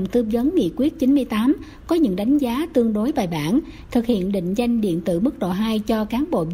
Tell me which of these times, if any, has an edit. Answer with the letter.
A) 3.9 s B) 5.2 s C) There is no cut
A